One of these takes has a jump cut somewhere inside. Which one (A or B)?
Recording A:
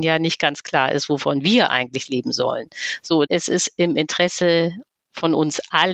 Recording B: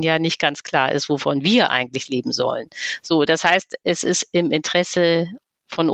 A